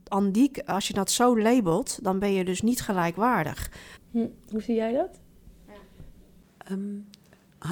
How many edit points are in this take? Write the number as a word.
one